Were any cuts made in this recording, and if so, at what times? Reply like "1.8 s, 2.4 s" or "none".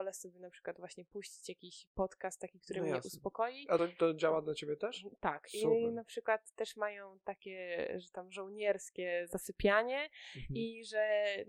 none